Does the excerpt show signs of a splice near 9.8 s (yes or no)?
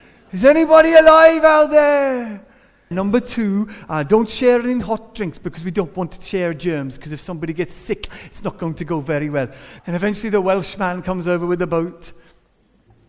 yes